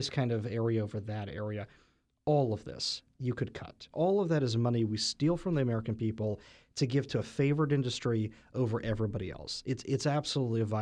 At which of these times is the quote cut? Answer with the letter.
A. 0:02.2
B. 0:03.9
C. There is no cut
B